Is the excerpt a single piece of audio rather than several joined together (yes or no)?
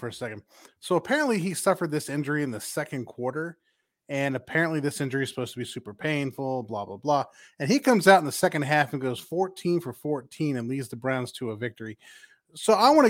yes